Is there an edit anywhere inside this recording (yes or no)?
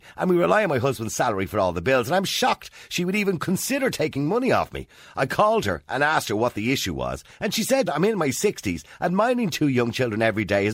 yes